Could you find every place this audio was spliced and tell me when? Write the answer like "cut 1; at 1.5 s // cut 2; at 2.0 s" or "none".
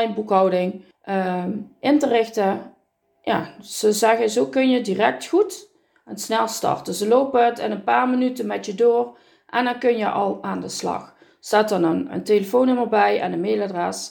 cut 1; at 12.1 s